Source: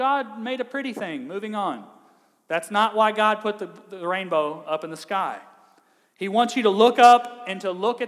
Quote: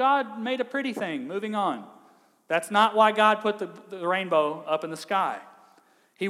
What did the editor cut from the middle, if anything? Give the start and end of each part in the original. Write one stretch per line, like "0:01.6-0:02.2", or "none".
none